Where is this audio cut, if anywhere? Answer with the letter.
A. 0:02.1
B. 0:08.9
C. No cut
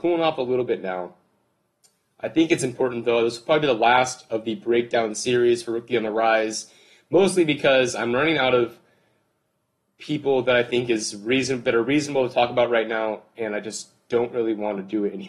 C